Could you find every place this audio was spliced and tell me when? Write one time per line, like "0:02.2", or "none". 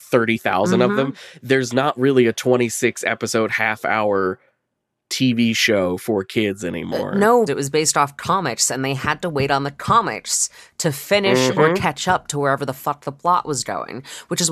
0:07.5